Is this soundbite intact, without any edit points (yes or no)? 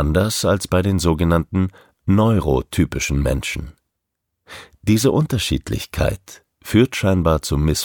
yes